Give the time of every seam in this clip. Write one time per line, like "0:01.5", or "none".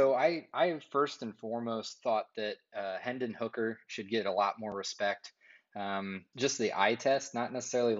0:06.3